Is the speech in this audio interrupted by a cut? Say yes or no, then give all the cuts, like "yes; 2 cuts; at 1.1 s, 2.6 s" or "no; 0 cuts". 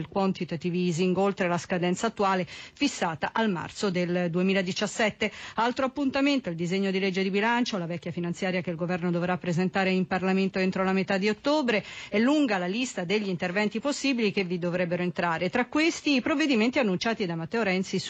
no; 0 cuts